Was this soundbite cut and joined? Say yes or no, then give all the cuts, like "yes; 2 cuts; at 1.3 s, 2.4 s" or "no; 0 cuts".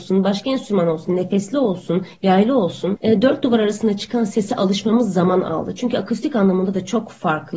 no; 0 cuts